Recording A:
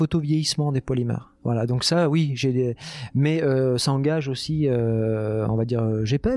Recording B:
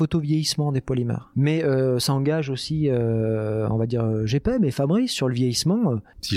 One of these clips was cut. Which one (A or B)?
B